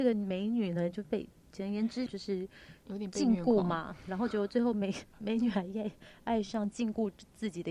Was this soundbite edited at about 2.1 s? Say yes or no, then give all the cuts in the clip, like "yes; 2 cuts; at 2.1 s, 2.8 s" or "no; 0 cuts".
yes; 1 cut; at 2.1 s